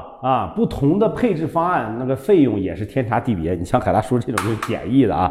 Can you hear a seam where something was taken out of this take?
no; 0 cuts

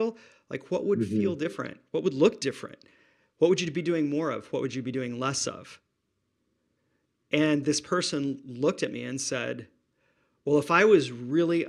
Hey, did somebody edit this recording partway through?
no; 0 cuts

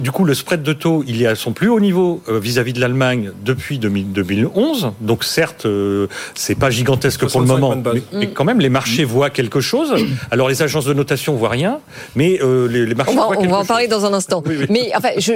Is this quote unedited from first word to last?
yes; 0 cuts

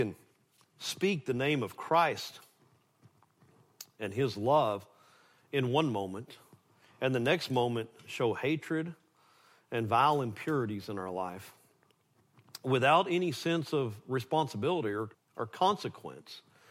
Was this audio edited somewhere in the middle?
yes; 1 cut; at 15.1 s

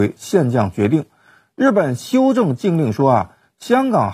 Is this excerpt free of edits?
yes; 0 cuts

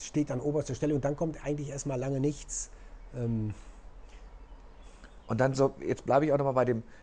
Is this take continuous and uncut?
yes; 0 cuts

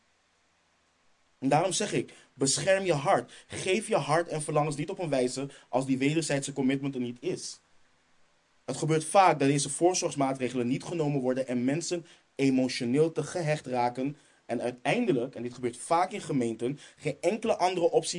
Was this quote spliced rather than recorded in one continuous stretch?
no; 0 cuts

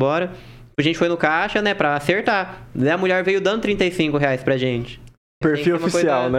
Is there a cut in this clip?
yes; 1 cut; at 5.4 s

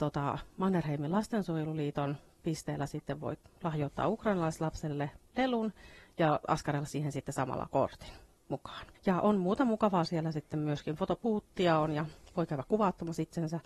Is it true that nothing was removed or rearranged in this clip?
no; 1 cut; at 8.9 s

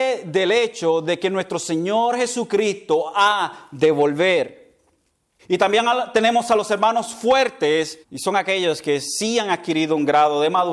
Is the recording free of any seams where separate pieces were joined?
no; 2 cuts; at 5.4 s, 8.0 s

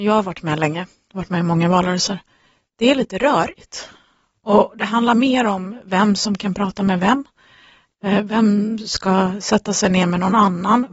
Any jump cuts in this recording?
no; 0 cuts

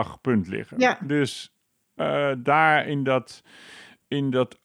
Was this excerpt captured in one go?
yes; 0 cuts

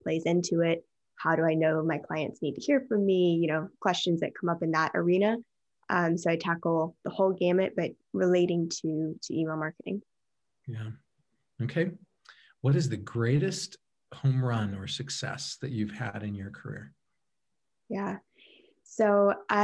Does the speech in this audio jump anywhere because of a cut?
no; 0 cuts

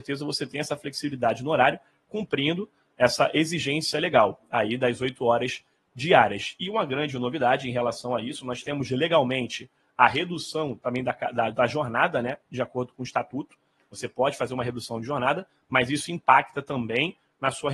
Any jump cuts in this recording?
no; 0 cuts

